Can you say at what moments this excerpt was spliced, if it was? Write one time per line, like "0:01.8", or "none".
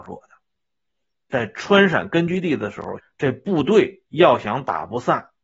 0:03.0